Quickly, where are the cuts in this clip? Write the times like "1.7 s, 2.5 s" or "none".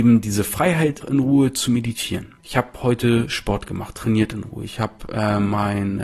1.0 s, 2.4 s